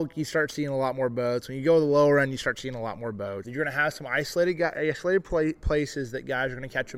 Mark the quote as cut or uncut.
cut